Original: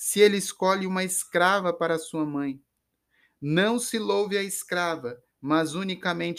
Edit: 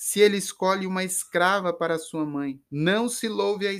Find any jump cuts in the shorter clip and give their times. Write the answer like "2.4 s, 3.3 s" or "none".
2.7 s